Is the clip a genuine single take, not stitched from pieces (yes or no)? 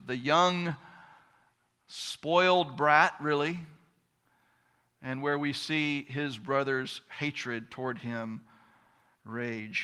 yes